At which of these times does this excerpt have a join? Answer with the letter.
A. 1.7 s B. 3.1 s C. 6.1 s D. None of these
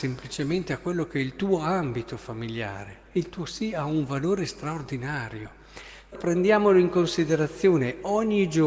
C